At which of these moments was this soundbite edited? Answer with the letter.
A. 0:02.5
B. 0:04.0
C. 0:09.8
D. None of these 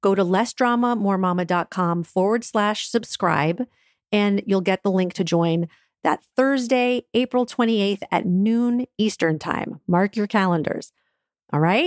D